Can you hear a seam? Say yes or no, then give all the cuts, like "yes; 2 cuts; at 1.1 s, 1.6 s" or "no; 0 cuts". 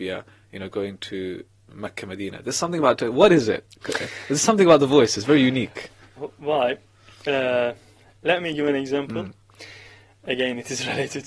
yes; 1 cut; at 6.2 s